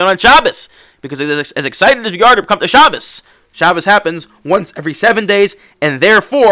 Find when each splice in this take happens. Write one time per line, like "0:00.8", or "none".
none